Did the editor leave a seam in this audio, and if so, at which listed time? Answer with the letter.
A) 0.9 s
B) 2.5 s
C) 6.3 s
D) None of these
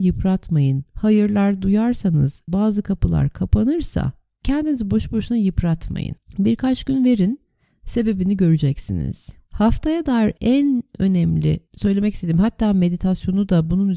B